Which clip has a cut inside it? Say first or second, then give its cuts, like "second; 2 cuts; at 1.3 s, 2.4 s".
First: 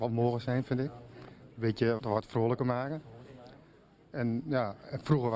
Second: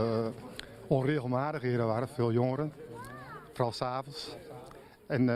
first; 1 cut; at 2.0 s